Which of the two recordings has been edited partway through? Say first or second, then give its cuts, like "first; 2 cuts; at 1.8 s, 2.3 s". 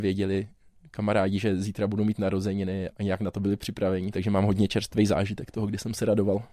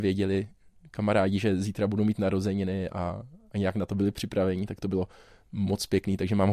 first; 2 cuts; at 2.9 s, 4.1 s